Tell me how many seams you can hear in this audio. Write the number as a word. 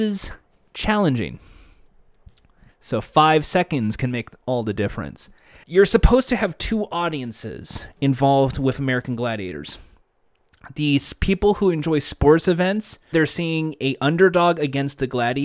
three